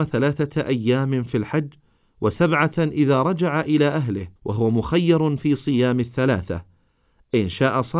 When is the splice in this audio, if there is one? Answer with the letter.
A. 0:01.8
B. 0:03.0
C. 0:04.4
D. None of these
C